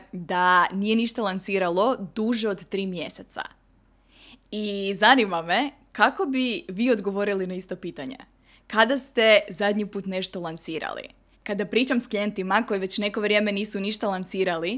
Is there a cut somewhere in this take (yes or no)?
yes